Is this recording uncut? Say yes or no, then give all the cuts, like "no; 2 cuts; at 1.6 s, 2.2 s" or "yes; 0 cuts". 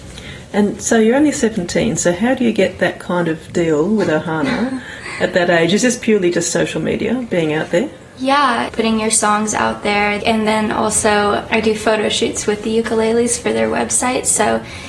no; 3 cuts; at 8.7 s, 10.2 s, 11.5 s